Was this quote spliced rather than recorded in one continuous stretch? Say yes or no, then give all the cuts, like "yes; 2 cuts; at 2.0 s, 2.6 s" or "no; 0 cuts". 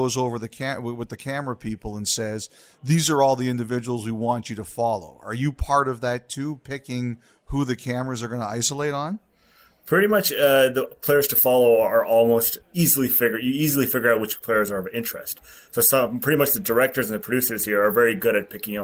no; 0 cuts